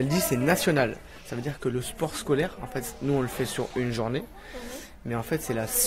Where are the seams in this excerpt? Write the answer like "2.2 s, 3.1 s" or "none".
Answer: none